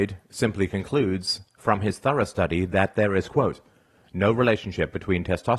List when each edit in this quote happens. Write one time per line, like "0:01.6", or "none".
none